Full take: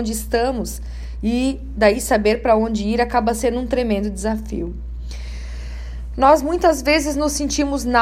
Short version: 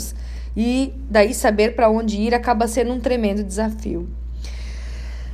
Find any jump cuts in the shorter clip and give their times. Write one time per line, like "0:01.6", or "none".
none